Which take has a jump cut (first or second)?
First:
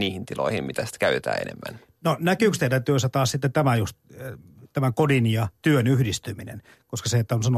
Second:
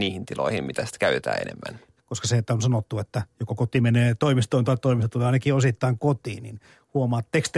second